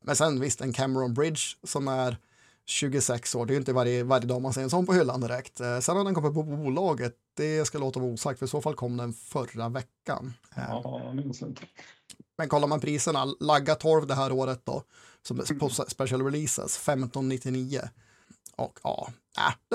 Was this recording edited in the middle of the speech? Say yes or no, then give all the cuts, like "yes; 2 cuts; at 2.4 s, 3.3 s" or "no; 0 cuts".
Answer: no; 0 cuts